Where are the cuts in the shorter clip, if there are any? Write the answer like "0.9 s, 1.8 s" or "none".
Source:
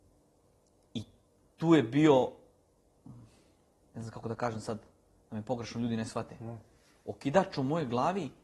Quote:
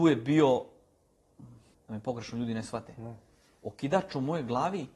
1.7 s